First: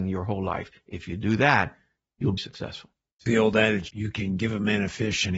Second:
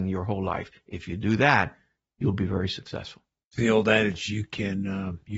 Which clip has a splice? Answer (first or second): first